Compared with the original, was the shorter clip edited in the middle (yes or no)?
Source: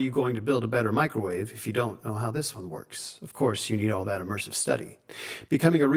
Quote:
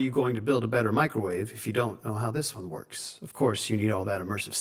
no